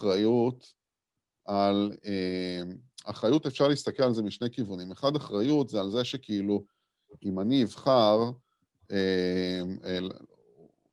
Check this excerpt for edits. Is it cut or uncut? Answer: uncut